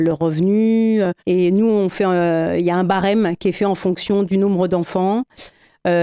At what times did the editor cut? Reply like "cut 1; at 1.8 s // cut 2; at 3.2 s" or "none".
cut 1; at 1.2 s